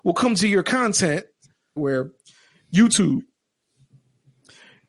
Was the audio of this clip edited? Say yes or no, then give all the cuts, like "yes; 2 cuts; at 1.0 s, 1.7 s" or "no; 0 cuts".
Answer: yes; 1 cut; at 1.8 s